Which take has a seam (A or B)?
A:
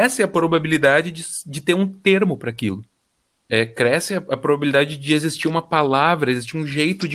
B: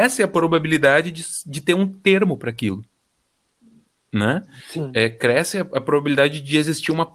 A